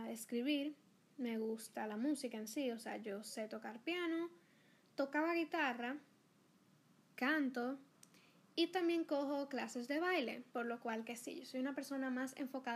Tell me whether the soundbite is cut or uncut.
cut